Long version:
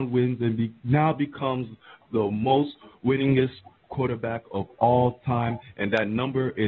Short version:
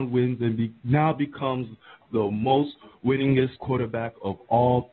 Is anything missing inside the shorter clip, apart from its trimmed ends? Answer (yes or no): yes